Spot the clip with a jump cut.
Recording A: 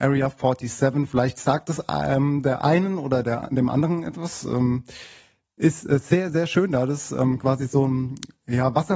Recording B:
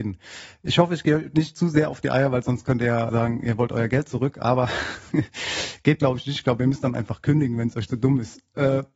B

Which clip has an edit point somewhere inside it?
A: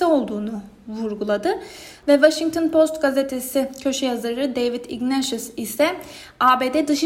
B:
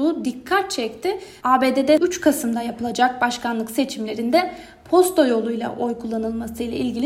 B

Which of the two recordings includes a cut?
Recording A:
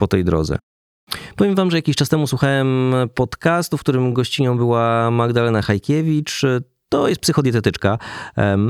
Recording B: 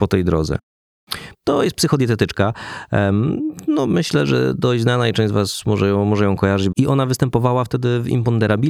B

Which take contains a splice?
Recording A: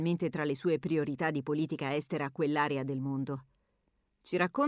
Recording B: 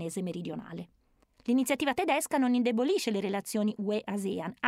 B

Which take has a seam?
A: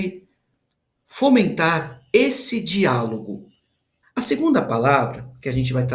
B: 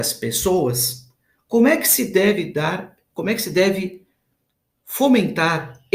A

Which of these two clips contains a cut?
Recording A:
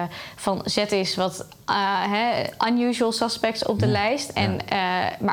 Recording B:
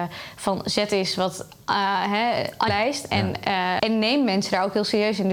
B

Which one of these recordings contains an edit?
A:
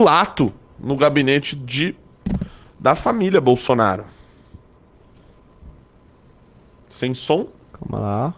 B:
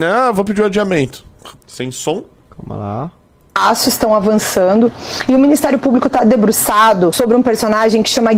B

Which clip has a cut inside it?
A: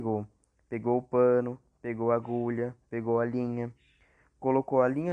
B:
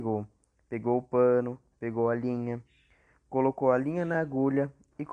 B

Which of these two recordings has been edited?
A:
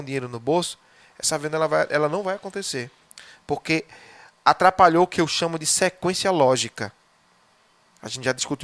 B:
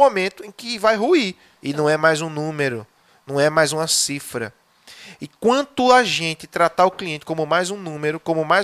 B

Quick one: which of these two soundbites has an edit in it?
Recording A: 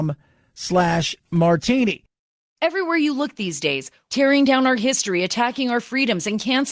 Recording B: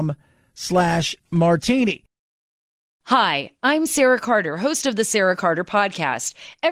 A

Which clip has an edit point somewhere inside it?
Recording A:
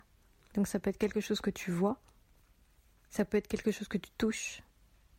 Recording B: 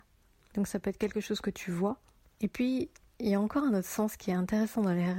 B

